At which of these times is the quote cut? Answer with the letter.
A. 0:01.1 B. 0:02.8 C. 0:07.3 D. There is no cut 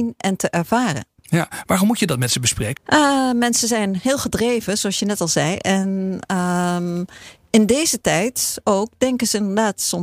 B